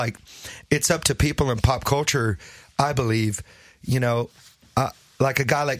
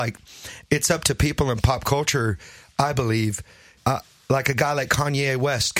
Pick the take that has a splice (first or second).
second